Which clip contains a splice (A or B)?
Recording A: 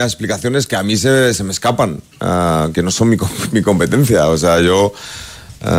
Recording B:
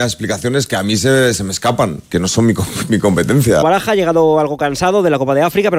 B